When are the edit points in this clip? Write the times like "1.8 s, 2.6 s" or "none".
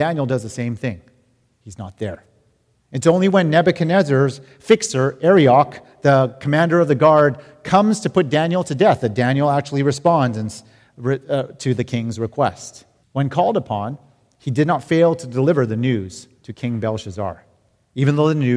2.7 s, 13.0 s, 16.4 s